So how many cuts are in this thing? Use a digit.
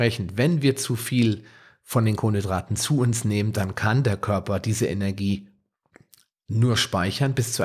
0